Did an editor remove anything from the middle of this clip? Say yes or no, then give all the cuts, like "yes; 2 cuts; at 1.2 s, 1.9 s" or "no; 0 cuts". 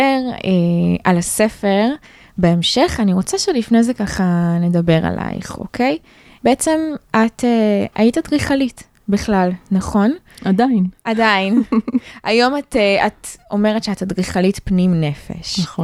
no; 0 cuts